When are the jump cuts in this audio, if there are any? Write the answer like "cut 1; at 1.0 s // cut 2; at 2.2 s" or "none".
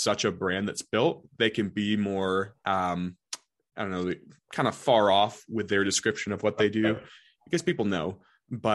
none